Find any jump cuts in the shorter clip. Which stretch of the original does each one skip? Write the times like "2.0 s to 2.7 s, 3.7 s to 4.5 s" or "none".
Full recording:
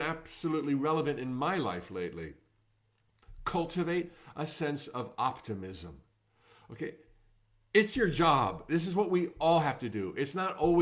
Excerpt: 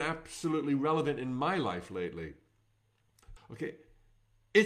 3.4 s to 6.6 s